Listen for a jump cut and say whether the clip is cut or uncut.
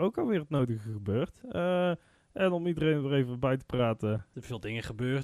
cut